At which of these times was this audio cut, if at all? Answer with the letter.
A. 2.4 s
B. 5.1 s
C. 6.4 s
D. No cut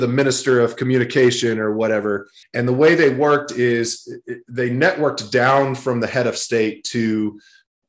A